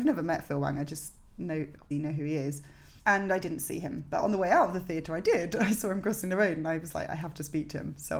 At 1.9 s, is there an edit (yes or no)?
yes